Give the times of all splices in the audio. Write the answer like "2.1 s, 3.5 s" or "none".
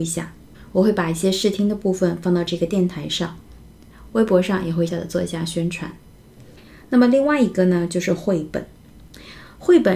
4.9 s